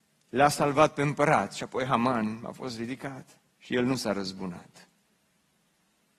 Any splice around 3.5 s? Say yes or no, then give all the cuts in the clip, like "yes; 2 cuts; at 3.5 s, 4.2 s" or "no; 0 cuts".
yes; 1 cut; at 3.5 s